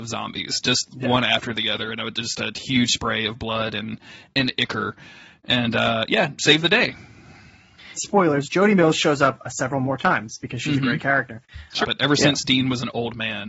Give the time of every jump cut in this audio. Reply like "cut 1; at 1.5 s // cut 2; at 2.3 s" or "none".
cut 1; at 8.0 s // cut 2; at 11.8 s